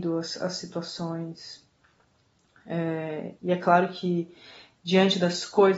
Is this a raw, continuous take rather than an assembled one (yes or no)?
no